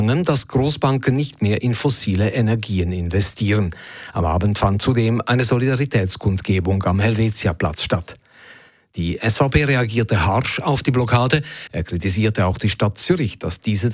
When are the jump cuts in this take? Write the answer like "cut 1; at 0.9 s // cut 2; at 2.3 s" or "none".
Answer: cut 1; at 11.7 s